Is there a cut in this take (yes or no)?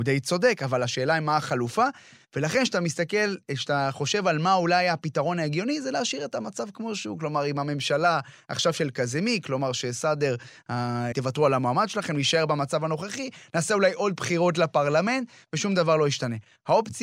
yes